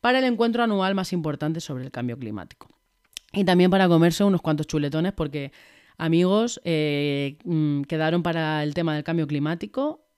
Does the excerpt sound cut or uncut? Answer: uncut